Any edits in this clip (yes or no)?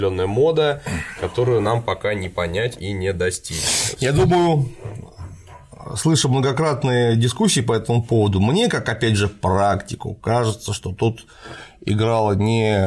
no